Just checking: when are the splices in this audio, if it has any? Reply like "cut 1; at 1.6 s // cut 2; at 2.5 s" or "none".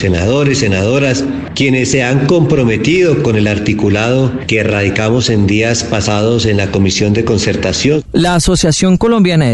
cut 1; at 1.5 s // cut 2; at 8.1 s